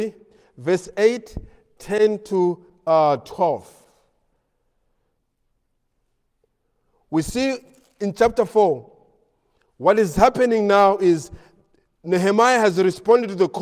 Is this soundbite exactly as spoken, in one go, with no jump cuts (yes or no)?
yes